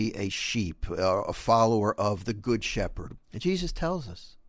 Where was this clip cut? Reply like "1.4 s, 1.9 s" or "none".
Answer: 3.2 s